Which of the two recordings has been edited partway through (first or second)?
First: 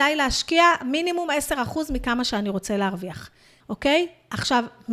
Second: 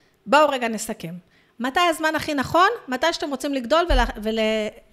first